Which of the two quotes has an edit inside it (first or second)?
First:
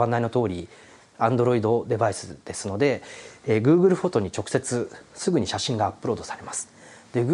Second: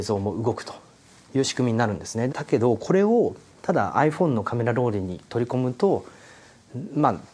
second